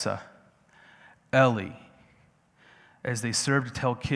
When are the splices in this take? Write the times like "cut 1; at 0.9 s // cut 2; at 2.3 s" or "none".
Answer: none